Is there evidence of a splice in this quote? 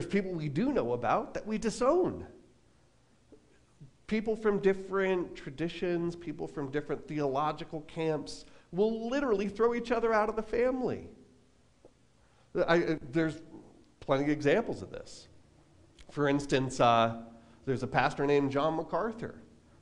no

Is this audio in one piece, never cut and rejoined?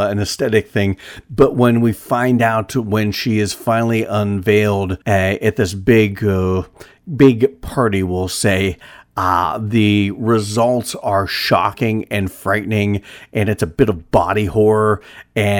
no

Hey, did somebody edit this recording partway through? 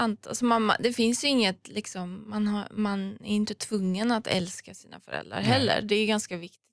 no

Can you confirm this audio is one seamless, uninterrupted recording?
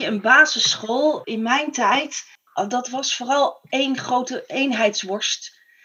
no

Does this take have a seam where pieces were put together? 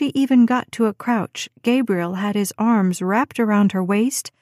no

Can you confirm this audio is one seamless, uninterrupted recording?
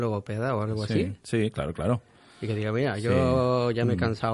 yes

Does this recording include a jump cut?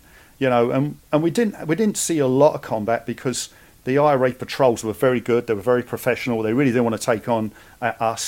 no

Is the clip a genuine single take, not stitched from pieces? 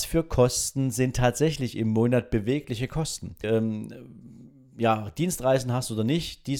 no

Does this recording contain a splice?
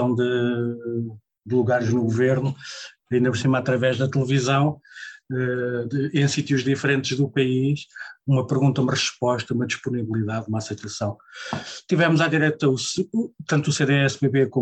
no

